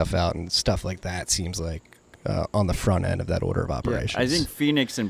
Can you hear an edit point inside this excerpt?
no; 0 cuts

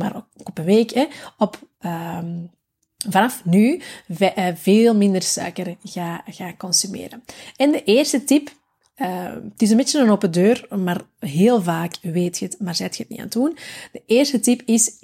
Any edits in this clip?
no; 0 cuts

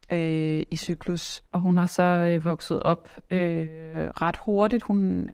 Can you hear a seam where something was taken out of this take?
yes; 1 cut; at 1.5 s

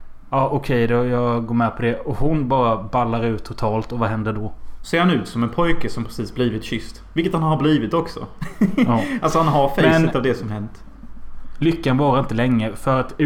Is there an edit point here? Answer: yes; 1 cut; at 4.8 s

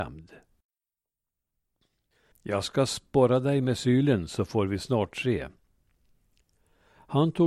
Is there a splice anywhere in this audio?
yes; 1 cut; at 2.3 s

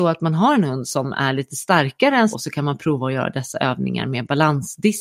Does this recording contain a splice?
yes; 1 cut; at 2.3 s

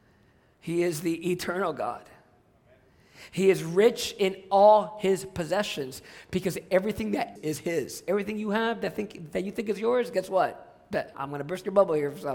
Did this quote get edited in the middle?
yes; 2 cuts; at 7.4 s, 11.1 s

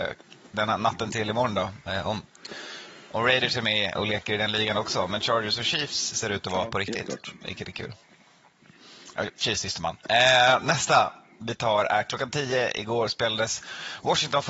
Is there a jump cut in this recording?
no; 0 cuts

